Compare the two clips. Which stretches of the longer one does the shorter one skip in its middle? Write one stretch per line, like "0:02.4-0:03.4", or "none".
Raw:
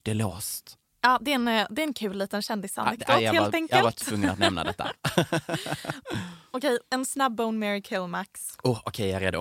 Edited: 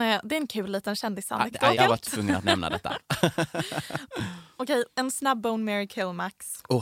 0:03.2-0:03.7